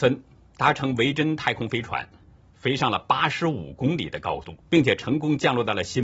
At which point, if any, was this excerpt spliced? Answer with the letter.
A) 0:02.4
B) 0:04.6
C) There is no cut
B